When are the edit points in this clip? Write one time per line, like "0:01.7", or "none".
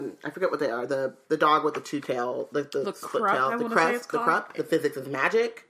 0:04.5